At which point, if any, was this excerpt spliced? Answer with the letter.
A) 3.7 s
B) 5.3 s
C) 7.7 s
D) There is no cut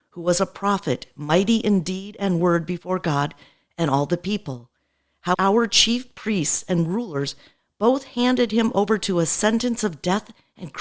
B